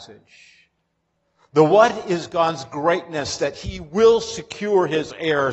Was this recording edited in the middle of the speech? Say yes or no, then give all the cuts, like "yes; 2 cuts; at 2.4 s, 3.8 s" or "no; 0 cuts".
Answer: no; 0 cuts